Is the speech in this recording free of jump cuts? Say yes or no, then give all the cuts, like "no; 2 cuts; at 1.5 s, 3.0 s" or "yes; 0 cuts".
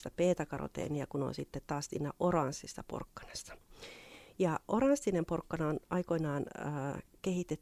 yes; 0 cuts